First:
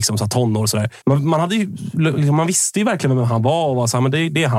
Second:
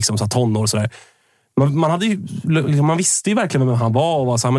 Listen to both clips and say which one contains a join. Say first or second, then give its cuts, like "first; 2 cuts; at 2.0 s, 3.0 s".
first; 1 cut; at 1.0 s